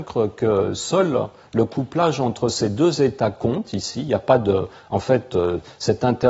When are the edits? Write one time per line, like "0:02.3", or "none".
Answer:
none